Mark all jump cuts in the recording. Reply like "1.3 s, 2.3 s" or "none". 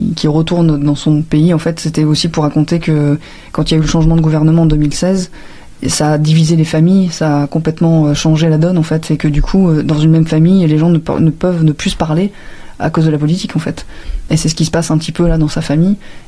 none